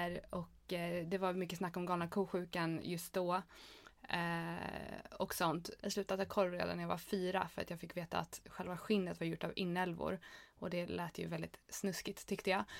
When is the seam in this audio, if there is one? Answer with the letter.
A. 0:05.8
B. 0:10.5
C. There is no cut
A